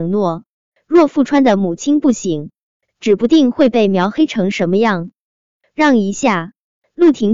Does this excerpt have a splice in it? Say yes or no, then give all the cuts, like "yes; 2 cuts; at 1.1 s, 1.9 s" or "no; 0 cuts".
yes; 1 cut; at 2.9 s